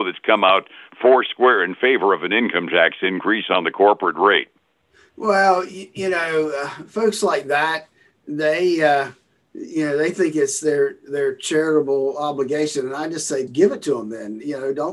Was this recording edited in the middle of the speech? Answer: yes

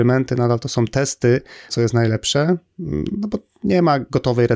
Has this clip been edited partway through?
yes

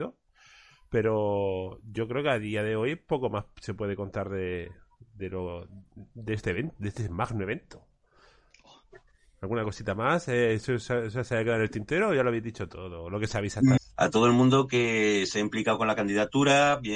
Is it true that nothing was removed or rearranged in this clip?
no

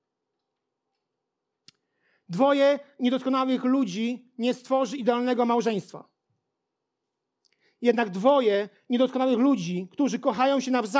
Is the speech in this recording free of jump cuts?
yes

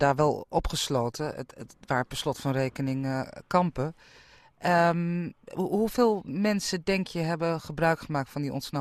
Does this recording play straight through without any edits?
yes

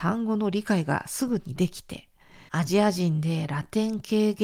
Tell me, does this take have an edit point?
yes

